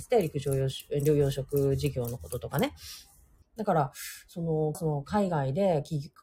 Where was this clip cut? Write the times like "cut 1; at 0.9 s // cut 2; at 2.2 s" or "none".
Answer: cut 1; at 3.4 s // cut 2; at 4.7 s